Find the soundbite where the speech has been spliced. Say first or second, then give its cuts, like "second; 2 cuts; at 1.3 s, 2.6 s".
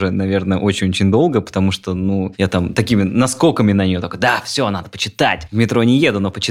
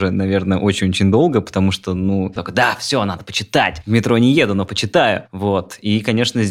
second; 1 cut; at 2.4 s